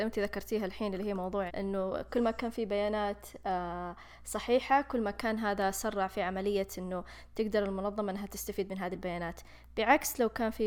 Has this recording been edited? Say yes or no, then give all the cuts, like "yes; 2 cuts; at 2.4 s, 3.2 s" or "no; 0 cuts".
yes; 1 cut; at 1.5 s